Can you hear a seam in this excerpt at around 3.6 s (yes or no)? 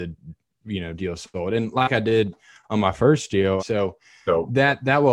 yes